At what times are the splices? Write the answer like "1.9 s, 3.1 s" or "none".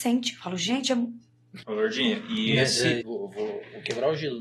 1.6 s, 3.0 s